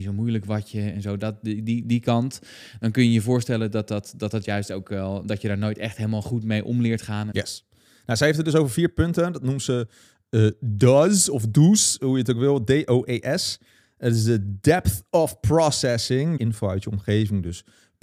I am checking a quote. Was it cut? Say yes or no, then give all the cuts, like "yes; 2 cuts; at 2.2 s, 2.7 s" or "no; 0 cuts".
yes; 2 cuts; at 7.3 s, 16.4 s